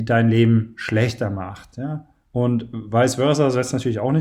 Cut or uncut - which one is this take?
uncut